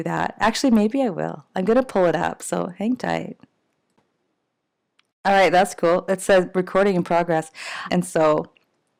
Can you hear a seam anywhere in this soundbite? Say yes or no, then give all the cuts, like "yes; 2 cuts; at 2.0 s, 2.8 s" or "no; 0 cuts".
yes; 2 cuts; at 5.1 s, 7.9 s